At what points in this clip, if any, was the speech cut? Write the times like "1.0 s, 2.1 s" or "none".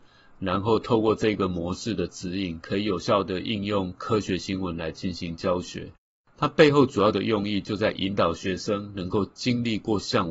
none